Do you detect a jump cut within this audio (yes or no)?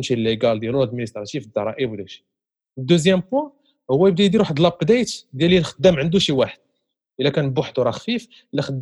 no